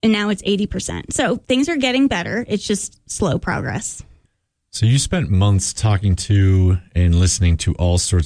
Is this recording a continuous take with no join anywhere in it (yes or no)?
yes